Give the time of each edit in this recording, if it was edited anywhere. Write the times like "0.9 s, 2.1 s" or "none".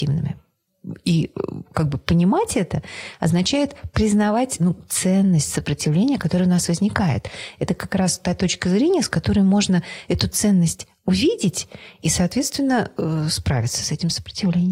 none